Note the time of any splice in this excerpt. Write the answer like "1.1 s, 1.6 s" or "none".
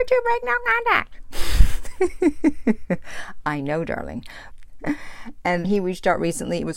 4.5 s, 5.6 s